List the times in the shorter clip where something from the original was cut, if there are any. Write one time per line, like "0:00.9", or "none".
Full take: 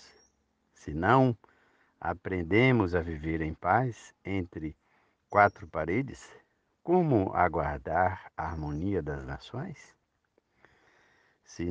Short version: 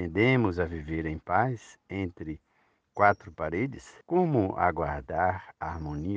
0:04.0

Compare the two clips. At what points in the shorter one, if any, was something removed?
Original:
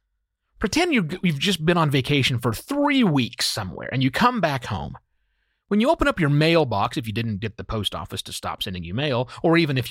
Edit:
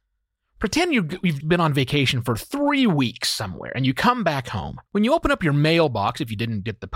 0:01.4
0:04.9

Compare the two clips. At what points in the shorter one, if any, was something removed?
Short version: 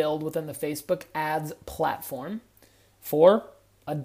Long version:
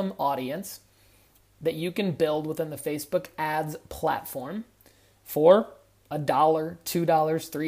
none

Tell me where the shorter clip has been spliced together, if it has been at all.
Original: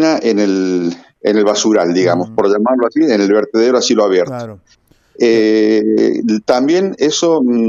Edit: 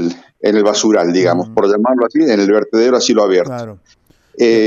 none

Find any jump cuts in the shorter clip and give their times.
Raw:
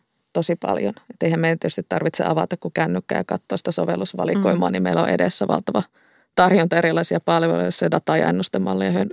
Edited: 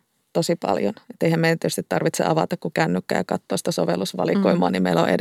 none

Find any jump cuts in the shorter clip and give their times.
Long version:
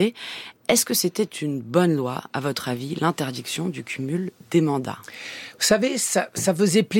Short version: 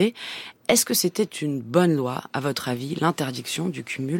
none

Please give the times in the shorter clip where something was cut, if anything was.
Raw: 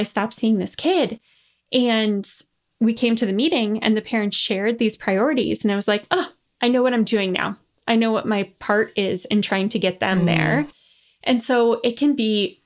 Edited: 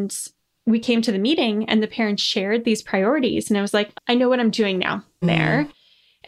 0:03.9
0:05.2

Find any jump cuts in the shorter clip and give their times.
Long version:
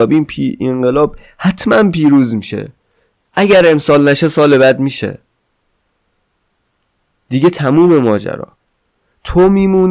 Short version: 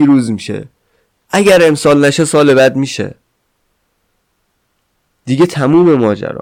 none

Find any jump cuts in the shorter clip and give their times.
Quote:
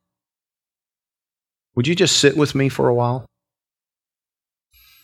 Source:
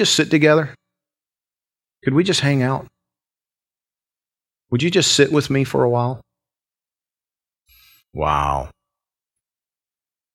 none

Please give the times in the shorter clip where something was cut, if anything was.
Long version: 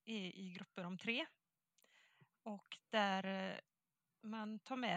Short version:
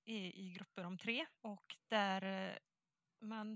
0:01.4

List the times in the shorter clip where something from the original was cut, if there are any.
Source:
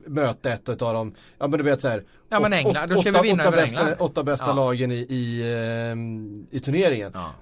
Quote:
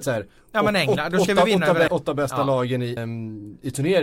0:01.9
0:03.0

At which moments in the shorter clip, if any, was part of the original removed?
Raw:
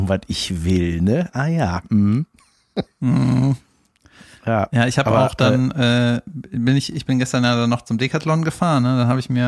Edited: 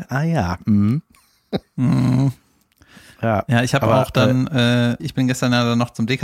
0:05.0

